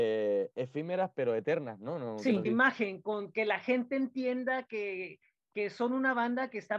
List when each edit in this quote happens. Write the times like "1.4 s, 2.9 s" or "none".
2.4 s